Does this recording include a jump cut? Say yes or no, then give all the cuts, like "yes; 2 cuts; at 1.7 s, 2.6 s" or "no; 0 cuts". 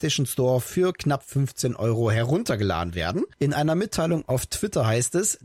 yes; 1 cut; at 3.3 s